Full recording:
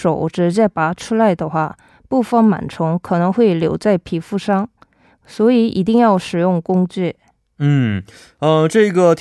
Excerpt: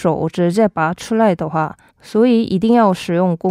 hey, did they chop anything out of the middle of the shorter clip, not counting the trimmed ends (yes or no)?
yes